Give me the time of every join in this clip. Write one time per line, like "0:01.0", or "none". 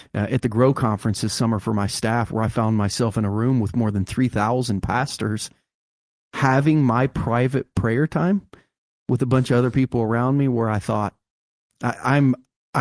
0:11.8